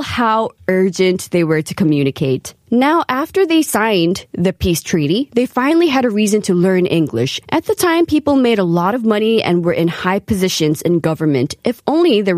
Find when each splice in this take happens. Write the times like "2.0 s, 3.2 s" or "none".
2.6 s, 7.4 s